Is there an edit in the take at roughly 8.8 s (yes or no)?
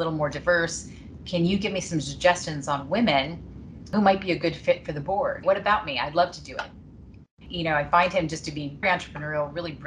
yes